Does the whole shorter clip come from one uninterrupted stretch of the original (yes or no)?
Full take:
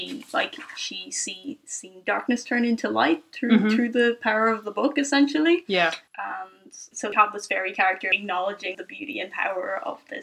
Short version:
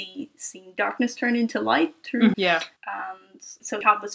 no